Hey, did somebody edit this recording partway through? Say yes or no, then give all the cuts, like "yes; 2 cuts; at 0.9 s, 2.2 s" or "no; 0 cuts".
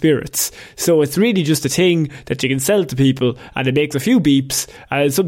no; 0 cuts